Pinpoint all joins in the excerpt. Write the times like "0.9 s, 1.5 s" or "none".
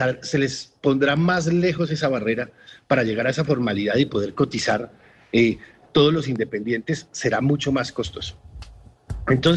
none